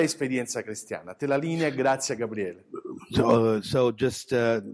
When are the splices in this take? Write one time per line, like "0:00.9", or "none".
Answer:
none